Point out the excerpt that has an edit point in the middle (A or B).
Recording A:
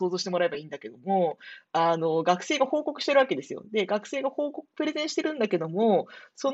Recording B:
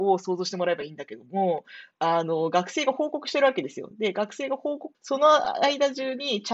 B